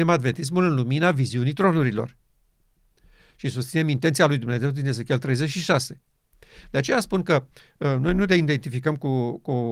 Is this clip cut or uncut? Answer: uncut